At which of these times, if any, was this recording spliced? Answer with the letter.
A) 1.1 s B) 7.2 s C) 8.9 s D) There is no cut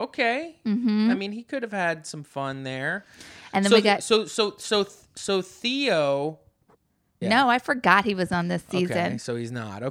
B